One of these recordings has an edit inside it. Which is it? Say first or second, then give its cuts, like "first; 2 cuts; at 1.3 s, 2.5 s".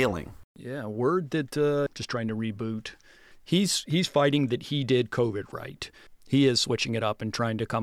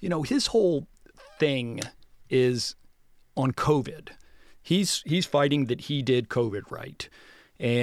first; 3 cuts; at 1.9 s, 3.3 s, 6.1 s